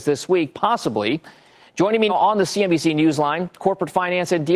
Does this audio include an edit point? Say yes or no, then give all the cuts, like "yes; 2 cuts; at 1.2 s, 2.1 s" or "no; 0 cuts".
yes; 1 cut; at 2.1 s